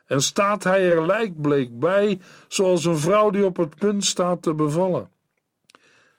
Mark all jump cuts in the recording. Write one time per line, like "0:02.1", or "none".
none